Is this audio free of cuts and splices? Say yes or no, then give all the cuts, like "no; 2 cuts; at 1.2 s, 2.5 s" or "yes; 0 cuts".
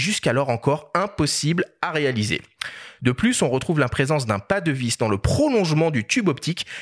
no; 1 cut; at 3.0 s